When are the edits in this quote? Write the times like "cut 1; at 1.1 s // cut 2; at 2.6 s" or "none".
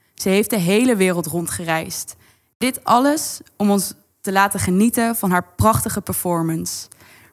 none